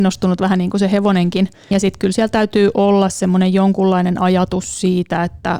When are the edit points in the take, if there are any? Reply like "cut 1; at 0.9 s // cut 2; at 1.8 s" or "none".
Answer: cut 1; at 1.7 s